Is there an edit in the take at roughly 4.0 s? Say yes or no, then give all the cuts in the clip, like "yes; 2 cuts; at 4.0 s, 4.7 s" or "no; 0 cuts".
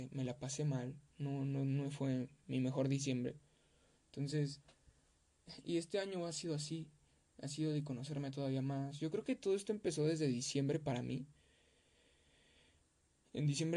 yes; 1 cut; at 4.0 s